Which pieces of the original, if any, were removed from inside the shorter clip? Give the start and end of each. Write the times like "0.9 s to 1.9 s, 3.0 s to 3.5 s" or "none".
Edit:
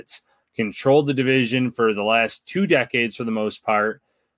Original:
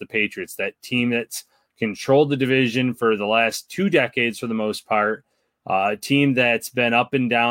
none